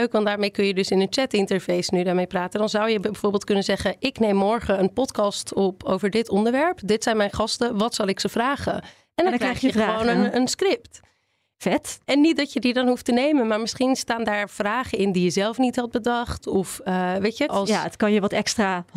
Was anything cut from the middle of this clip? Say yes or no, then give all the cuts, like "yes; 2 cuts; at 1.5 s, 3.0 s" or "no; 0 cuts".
yes; 1 cut; at 17.5 s